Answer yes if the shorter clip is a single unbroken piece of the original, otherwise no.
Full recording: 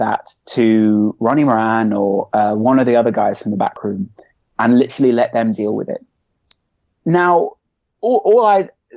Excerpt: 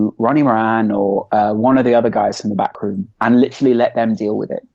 no